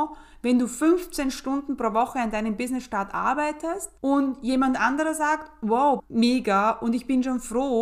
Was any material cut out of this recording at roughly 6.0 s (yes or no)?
yes